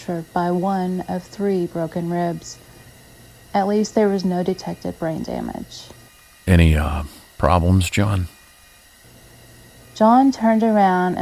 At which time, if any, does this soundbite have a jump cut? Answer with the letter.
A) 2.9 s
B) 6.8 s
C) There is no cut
C